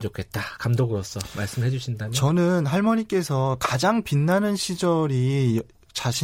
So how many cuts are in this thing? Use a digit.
0